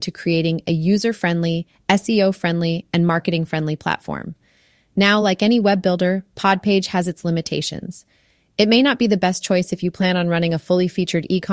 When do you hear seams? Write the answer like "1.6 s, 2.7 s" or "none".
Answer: none